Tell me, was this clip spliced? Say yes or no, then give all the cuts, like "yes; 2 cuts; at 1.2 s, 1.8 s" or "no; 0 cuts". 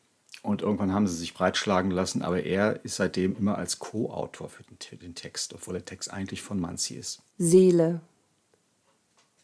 yes; 1 cut; at 7.3 s